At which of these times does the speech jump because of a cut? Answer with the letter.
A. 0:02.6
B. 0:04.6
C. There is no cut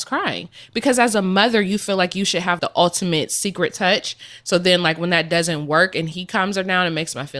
A